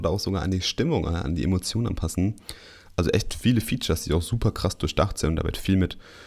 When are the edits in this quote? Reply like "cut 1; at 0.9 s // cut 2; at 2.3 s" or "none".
none